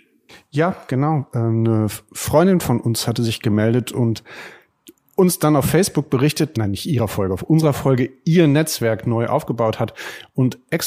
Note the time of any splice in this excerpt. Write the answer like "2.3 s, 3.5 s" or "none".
6.5 s